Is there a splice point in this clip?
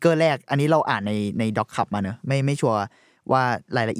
no; 0 cuts

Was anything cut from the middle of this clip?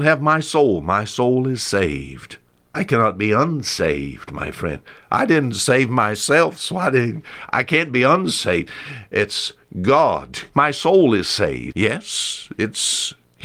yes; 2 cuts; at 10.5 s, 11.7 s

